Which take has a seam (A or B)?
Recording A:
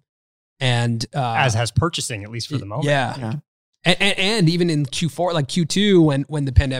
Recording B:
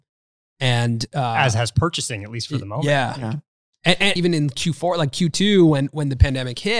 B